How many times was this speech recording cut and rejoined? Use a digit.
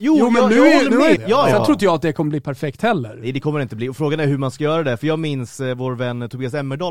1